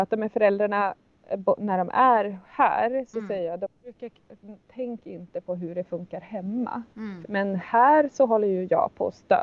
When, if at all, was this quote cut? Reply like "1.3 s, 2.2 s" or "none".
7.2 s